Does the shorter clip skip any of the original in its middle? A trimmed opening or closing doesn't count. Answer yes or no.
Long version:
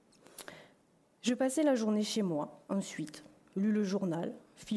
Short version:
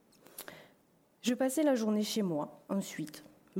no